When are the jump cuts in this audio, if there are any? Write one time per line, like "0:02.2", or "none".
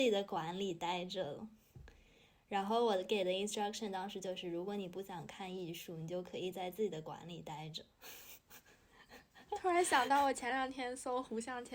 none